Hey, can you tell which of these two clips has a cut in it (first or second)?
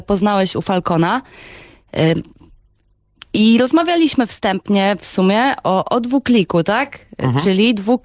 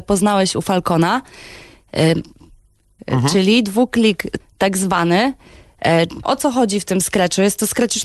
second